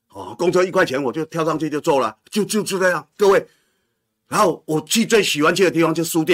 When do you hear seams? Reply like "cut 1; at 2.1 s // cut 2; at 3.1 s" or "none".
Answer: none